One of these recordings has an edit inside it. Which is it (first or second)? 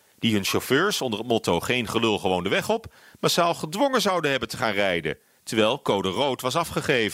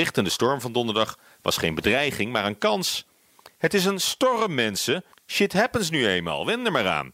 second